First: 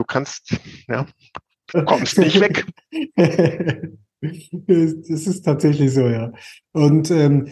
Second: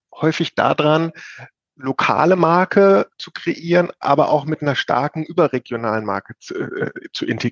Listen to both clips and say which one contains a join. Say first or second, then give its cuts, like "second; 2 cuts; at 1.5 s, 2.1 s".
first; 1 cut; at 1.7 s